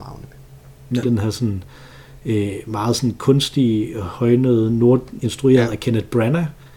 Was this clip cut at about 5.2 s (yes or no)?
yes